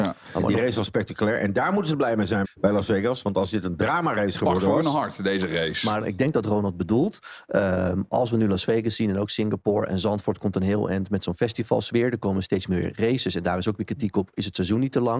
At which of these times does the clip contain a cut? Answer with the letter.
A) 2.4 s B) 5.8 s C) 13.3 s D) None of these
A